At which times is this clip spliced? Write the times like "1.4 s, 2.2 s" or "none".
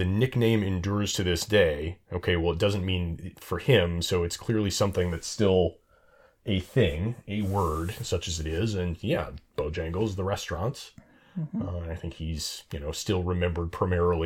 none